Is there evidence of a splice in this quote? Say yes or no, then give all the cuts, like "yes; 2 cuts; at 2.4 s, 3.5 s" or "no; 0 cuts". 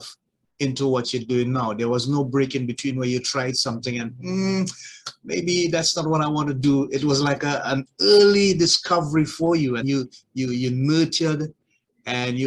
yes; 1 cut; at 9.8 s